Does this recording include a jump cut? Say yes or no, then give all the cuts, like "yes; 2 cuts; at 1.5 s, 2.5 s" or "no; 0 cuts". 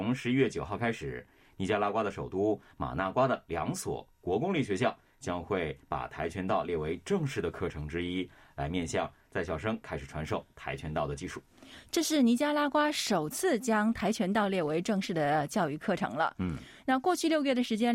no; 0 cuts